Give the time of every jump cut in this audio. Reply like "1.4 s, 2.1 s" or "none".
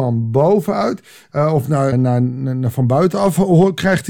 1.9 s